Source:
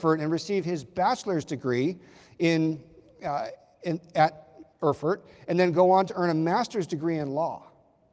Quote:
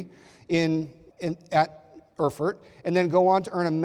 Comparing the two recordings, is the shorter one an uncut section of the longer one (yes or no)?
no